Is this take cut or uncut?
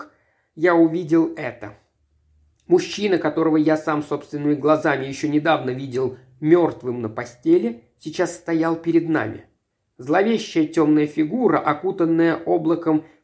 uncut